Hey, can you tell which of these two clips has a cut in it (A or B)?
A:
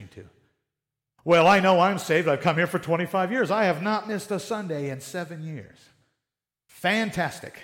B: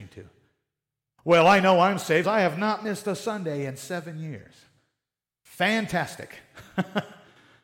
B